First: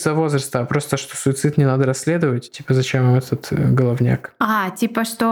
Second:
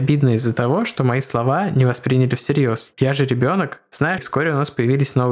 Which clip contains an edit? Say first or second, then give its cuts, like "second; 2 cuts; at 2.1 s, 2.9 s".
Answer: second; 2 cuts; at 2.9 s, 4.2 s